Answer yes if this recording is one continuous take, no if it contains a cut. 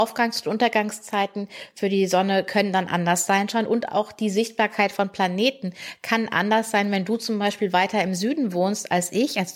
yes